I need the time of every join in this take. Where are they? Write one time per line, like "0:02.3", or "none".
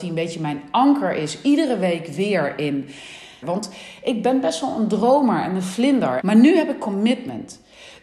0:03.4
0:06.2